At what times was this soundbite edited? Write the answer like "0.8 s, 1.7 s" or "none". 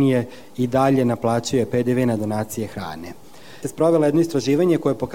3.6 s